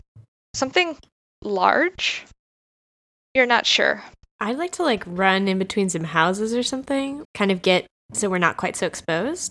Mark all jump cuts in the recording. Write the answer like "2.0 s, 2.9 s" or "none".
4.2 s, 7.2 s